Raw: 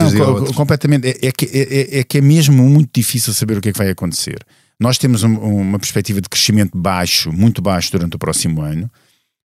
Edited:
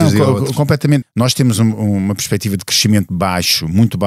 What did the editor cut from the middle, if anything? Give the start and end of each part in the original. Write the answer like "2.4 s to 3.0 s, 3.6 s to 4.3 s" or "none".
1.0 s to 4.7 s

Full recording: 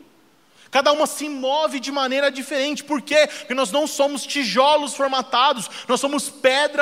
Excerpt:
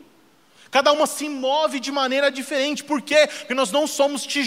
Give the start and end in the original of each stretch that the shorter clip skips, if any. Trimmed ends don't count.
none

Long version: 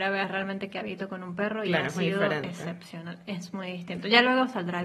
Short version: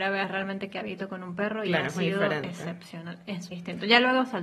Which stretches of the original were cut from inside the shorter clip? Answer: 3.5 s to 3.7 s

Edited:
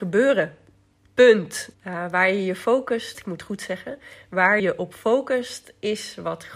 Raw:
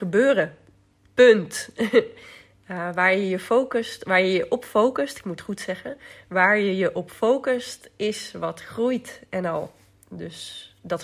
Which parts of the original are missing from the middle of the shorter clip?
1.7 s to 2.6 s, 4.0 s to 5.1 s, 6.6 s to 6.8 s

